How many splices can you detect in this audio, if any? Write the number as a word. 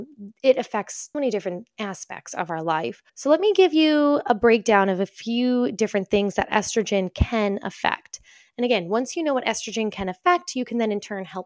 two